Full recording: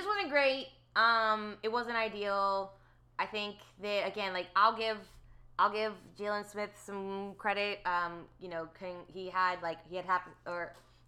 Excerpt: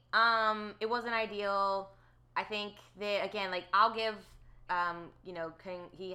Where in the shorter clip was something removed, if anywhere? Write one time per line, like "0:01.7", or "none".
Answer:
0:04.7